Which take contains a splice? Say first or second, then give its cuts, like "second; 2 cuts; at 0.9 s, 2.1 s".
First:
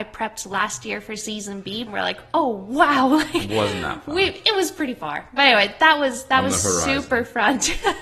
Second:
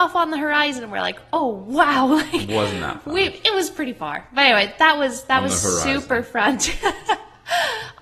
first; 1 cut; at 1.9 s